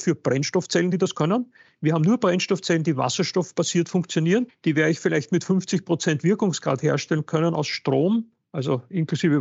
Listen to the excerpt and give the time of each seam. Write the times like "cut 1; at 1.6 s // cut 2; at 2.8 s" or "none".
cut 1; at 4.5 s